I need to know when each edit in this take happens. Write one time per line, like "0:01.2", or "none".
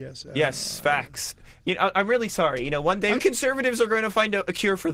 0:03.2